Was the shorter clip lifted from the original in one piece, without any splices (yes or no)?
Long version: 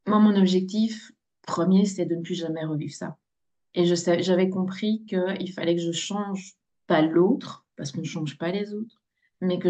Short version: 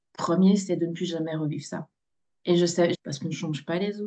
no